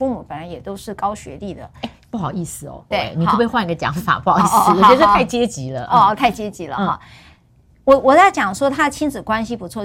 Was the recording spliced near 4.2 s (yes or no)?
no